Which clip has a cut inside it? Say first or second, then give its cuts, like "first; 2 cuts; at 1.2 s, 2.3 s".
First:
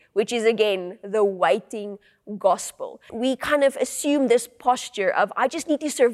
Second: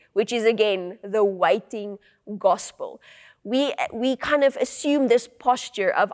first; 1 cut; at 3.1 s